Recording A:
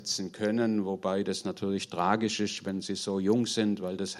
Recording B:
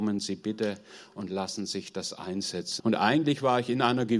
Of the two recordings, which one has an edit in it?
B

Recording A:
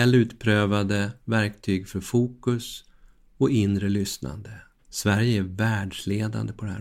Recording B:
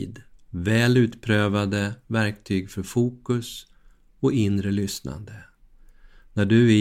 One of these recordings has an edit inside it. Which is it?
A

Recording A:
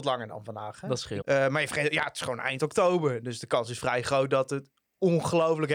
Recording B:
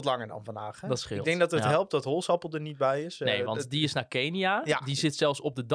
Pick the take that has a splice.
A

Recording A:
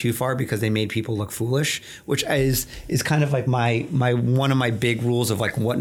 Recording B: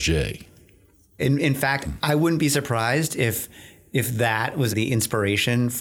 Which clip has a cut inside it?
B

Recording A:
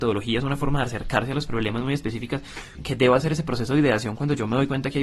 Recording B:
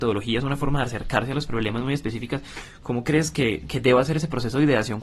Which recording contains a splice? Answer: A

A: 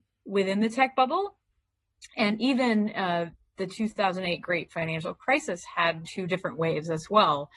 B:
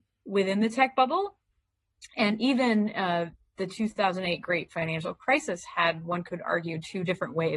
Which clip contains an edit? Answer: A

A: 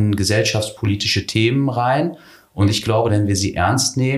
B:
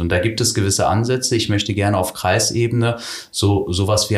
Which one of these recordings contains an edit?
A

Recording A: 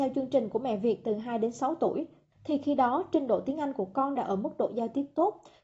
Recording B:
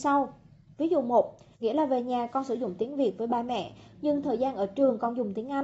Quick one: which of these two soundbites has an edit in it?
B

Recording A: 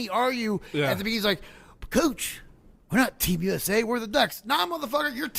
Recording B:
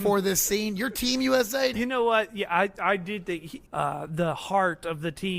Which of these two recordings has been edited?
B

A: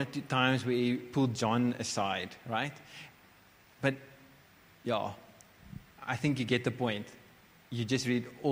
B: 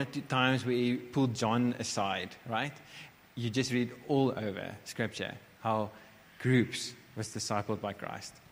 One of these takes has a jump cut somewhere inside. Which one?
B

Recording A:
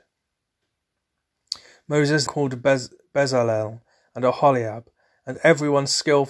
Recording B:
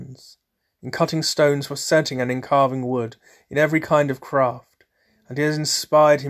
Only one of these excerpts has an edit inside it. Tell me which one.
A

